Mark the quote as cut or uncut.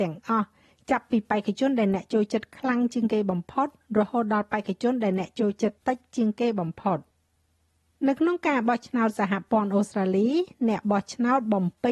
cut